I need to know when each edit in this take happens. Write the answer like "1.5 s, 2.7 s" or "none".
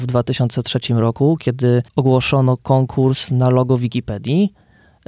1.9 s